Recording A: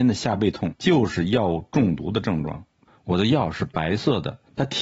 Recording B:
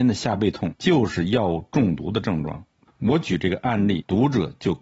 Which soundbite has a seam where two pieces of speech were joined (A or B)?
A